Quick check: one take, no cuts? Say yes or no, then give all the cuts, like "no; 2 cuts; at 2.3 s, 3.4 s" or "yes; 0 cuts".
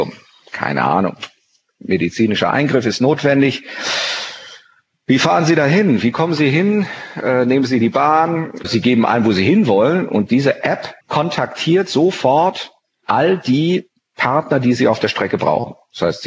no; 2 cuts; at 8.6 s, 11.0 s